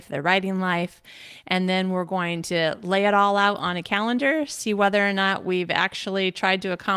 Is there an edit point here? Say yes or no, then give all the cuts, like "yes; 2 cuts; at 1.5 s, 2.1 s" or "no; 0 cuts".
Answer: yes; 1 cut; at 1.4 s